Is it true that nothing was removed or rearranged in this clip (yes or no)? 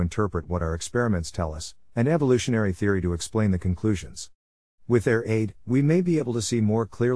no